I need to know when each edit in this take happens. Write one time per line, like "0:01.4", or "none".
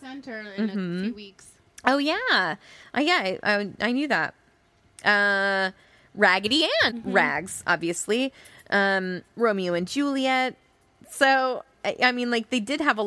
0:06.9
0:11.0